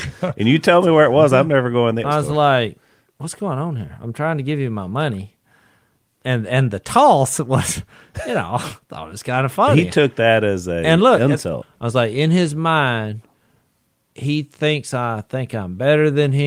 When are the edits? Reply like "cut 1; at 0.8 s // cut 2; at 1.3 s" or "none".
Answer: cut 1; at 2.0 s // cut 2; at 11.6 s